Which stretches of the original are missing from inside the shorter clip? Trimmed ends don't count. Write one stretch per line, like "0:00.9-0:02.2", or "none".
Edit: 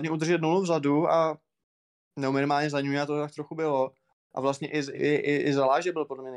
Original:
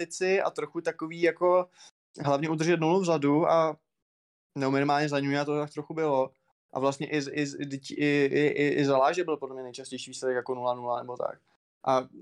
0:07.3-0:08.3